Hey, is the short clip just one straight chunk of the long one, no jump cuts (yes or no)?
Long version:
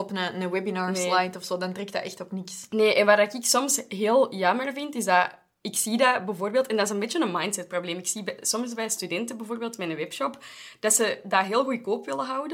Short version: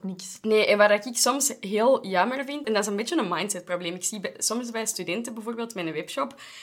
no